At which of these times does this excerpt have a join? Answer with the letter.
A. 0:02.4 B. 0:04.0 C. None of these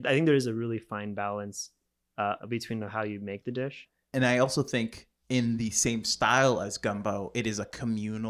A